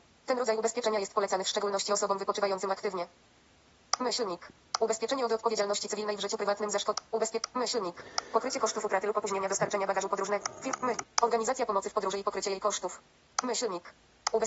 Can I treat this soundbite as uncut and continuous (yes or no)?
no